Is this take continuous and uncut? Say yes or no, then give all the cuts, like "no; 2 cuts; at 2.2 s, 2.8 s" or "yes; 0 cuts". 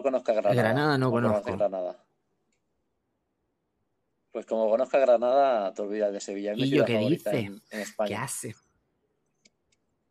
yes; 0 cuts